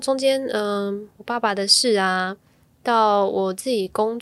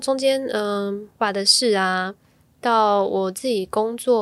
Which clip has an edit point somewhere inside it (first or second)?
second